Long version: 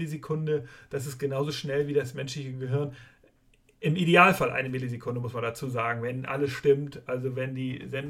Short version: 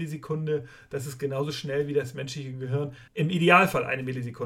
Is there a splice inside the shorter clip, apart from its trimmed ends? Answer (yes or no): yes